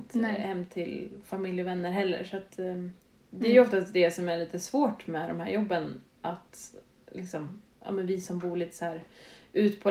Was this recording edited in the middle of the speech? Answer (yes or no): no